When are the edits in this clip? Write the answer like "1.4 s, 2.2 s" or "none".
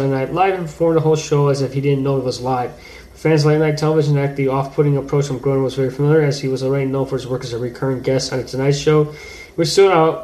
none

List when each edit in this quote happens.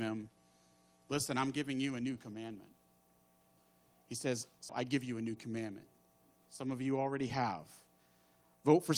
4.7 s, 6.4 s

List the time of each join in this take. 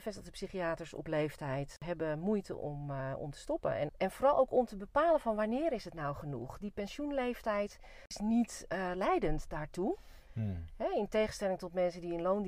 3.9 s

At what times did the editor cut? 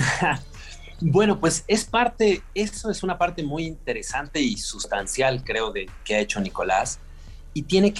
6.0 s

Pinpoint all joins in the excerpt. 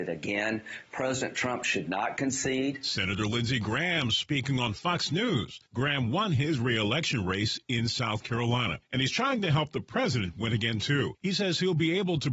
none

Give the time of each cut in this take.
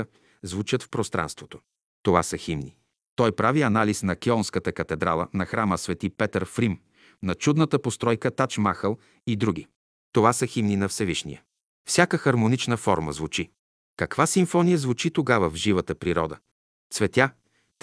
none

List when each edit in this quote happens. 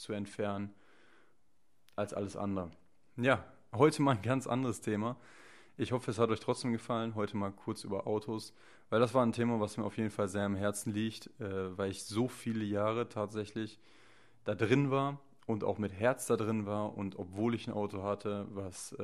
none

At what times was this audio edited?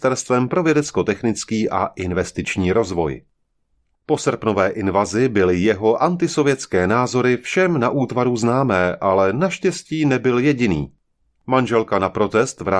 3.9 s

